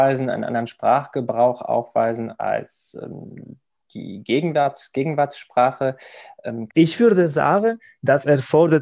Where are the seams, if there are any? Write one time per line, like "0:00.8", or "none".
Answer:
0:06.7